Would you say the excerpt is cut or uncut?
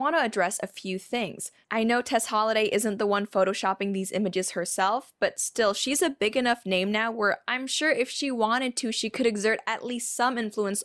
cut